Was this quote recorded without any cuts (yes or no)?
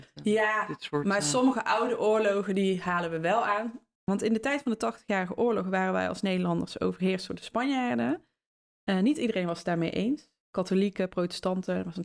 no